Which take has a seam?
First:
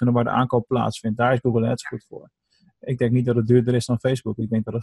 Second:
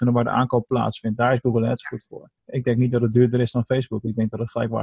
second; 1 cut; at 2.4 s

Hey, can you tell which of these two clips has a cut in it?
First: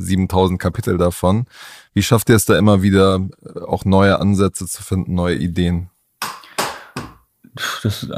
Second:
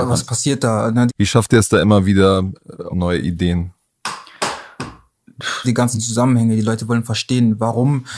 second; 3 cuts; at 1.1 s, 2.9 s, 5.6 s

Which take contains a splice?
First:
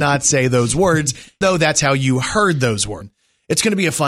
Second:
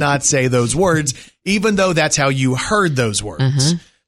first; 2 cuts; at 1.4 s, 3.0 s

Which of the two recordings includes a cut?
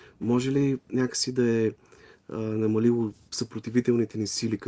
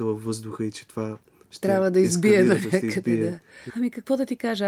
second; 1 cut; at 3.7 s

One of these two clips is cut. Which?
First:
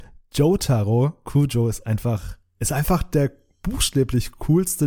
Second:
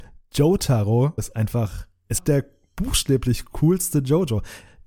second; 2 cuts; at 1.2 s, 2.2 s

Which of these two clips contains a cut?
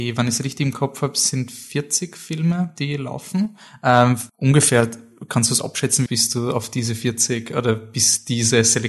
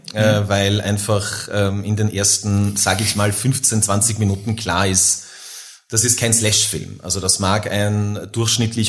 first; 2 cuts; at 4.3 s, 6.1 s

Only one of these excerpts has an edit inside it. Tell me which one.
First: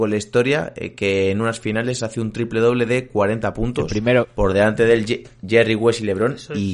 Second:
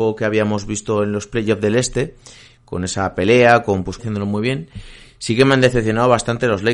second; 1 cut; at 4.0 s

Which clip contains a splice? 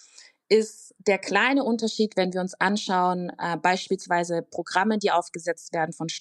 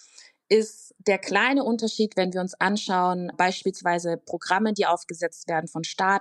second; 1 cut; at 3.3 s

